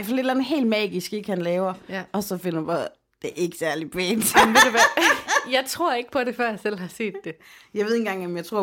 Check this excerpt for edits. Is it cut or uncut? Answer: uncut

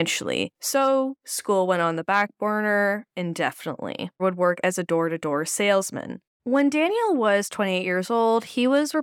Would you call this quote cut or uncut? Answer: cut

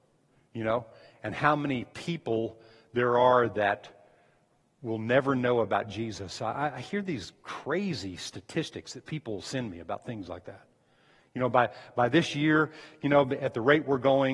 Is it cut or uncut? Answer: uncut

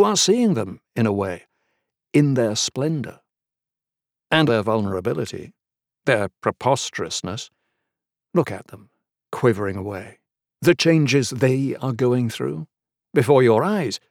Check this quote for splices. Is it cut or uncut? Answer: cut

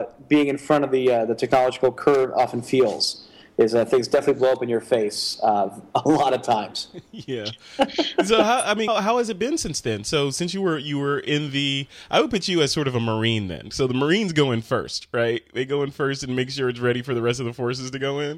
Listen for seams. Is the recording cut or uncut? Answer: cut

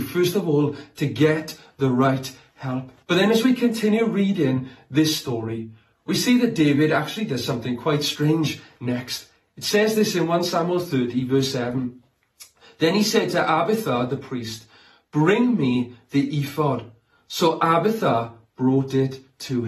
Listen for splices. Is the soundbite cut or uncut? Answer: cut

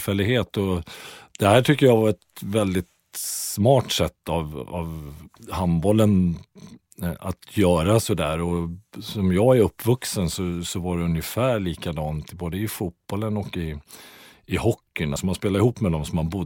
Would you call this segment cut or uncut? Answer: cut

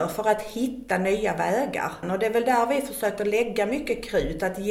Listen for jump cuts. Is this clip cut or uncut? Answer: cut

